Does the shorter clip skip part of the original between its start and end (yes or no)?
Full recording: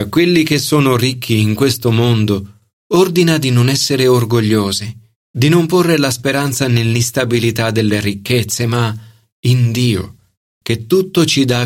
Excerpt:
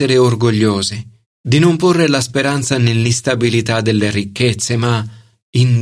no